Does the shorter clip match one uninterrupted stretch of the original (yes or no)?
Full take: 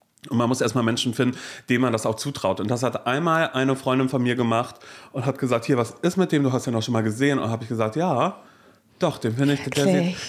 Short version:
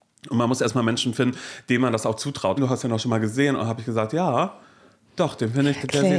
no